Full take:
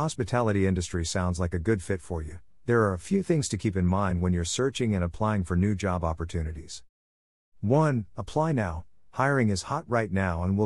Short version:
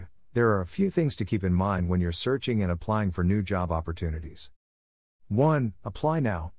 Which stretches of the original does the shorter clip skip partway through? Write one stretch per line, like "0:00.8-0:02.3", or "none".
none